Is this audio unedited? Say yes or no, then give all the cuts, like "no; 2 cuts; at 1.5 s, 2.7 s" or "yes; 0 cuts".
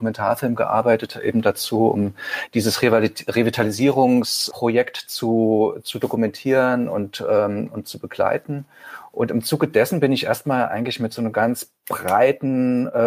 yes; 0 cuts